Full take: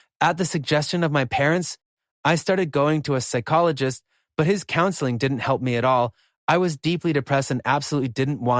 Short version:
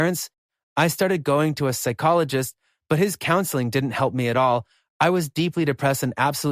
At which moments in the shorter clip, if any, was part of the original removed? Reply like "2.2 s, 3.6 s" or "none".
none